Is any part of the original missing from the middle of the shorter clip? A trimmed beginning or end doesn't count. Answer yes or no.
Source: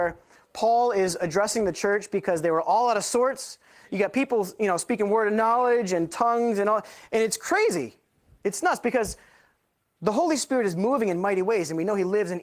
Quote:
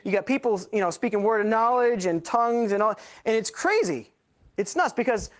no